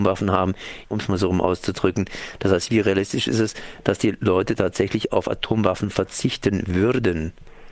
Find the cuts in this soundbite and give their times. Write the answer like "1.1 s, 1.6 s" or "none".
0.9 s